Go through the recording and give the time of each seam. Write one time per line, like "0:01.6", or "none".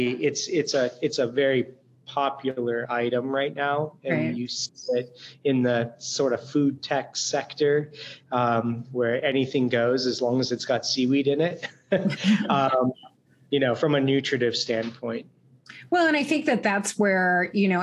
none